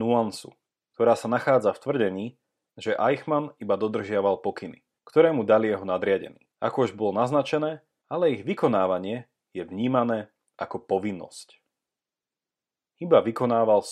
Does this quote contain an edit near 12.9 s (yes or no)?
yes